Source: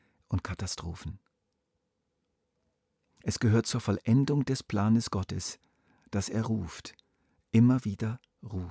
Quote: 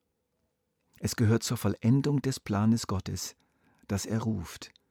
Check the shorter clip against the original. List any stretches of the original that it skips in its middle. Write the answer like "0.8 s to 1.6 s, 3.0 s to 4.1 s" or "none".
none